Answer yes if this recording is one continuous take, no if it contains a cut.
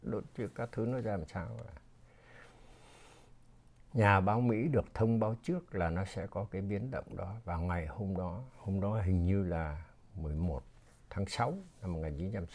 yes